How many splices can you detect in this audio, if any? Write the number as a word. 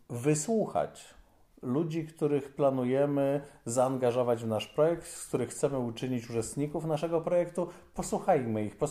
zero